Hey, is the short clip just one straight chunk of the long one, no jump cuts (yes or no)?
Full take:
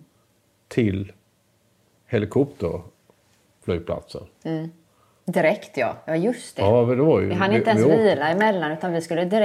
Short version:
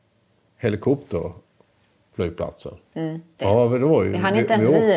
no